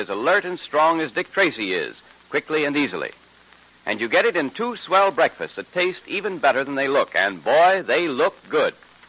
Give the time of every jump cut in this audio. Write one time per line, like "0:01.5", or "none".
none